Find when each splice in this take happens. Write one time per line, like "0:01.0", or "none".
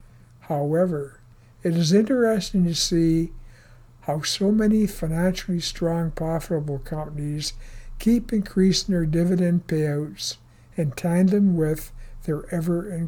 none

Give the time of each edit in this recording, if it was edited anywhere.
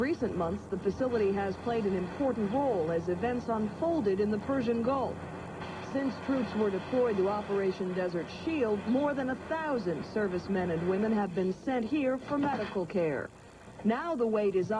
none

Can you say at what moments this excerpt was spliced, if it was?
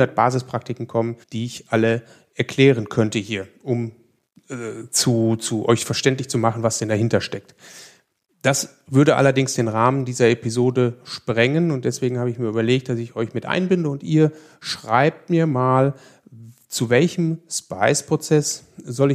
0:01.2

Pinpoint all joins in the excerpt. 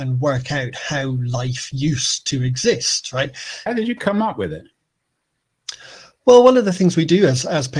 0:03.7

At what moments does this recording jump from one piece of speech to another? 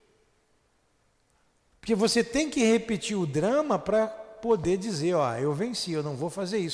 0:01.7

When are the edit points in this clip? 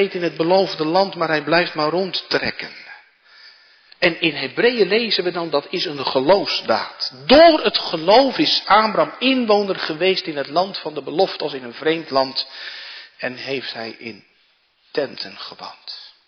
none

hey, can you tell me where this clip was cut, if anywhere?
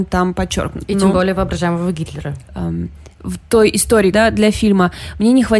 0:02.5
0:04.1

